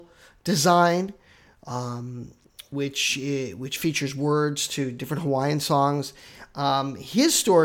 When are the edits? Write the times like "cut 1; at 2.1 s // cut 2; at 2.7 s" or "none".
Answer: none